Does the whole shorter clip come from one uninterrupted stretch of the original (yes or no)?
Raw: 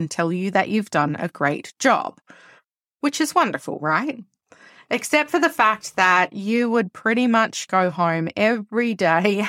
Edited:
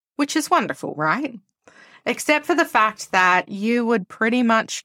yes